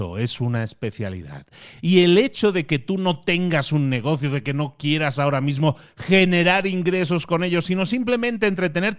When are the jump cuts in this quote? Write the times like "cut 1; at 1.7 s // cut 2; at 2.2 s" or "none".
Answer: none